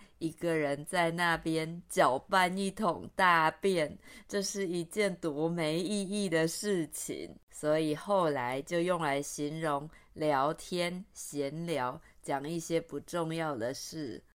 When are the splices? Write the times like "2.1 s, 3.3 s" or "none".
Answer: 7.4 s